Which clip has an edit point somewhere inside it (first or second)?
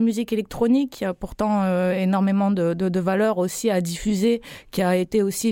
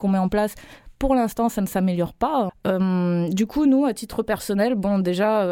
second